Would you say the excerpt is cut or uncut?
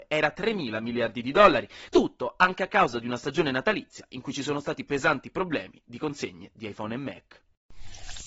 cut